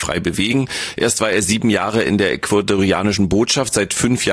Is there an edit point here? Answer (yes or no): no